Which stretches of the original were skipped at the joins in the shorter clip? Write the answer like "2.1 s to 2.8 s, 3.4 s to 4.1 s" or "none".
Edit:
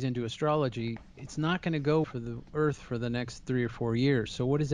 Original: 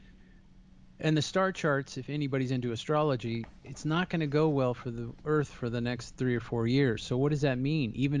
4.5 s to 4.8 s